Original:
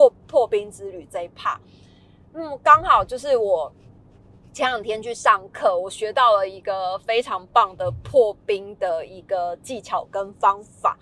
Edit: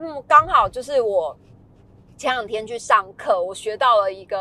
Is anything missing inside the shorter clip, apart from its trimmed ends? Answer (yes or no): no